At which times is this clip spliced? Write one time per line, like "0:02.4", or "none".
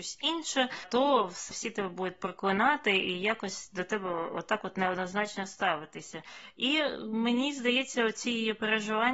none